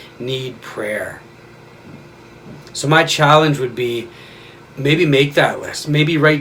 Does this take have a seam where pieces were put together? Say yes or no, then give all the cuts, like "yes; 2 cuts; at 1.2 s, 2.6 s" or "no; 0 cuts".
no; 0 cuts